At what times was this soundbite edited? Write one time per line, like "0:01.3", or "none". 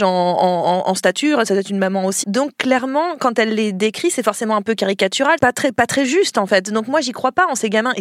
0:02.2
0:05.4